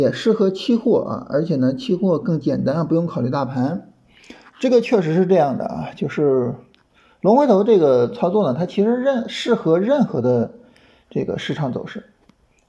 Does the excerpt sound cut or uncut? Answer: uncut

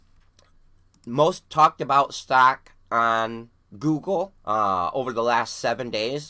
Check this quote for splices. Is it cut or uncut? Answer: cut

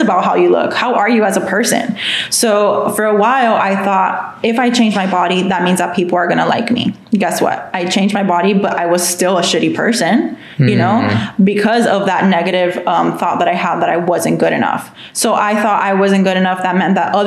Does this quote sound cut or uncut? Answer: uncut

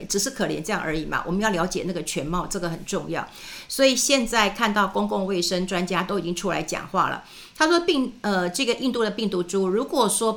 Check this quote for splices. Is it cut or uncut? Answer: uncut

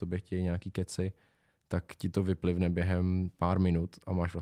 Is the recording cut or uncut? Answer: uncut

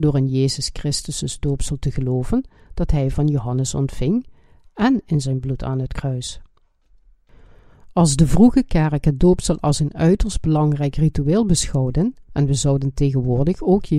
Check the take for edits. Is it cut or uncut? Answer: cut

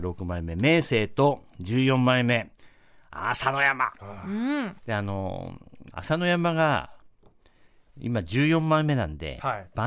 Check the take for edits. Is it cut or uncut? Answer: cut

